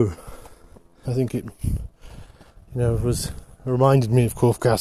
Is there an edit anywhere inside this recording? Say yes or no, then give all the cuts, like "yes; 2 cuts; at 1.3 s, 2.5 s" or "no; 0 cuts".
yes; 1 cut; at 1.0 s